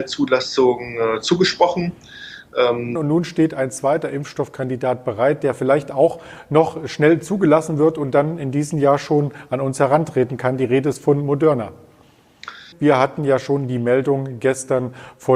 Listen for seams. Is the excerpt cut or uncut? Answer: cut